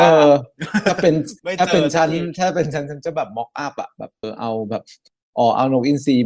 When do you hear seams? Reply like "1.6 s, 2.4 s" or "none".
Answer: 4.2 s